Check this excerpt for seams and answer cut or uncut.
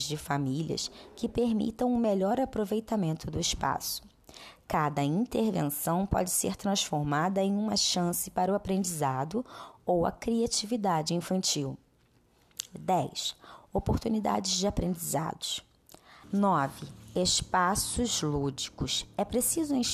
cut